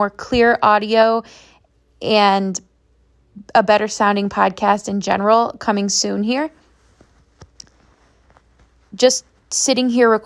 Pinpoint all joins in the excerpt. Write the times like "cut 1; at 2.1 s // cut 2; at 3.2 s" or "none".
none